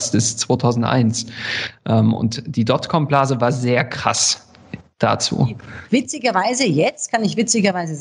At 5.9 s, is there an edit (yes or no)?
yes